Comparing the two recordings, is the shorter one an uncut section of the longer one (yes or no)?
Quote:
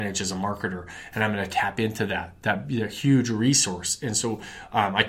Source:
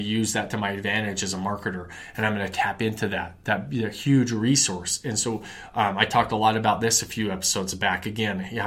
yes